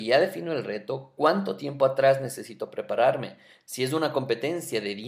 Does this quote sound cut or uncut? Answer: uncut